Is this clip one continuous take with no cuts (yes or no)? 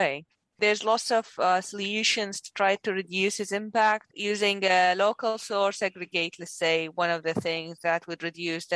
yes